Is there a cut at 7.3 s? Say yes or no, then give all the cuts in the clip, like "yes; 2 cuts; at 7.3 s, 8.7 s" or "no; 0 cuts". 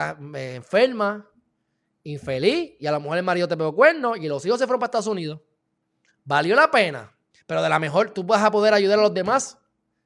yes; 1 cut; at 7.3 s